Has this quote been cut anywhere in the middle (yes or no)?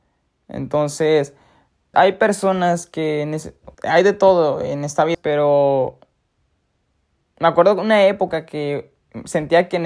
yes